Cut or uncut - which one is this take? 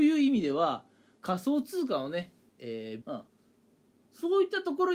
cut